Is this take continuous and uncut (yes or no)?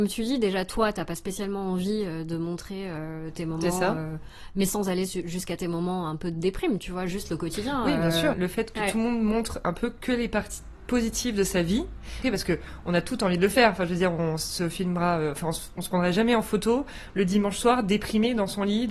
no